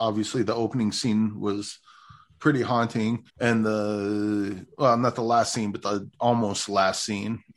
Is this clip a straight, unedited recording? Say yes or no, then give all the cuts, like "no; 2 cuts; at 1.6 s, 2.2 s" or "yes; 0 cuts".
no; 1 cut; at 3.3 s